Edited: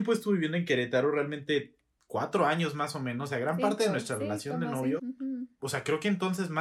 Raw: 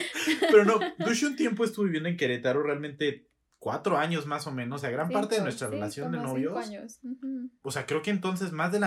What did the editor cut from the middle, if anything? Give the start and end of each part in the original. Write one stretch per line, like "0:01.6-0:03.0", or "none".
0:06.5-0:07.0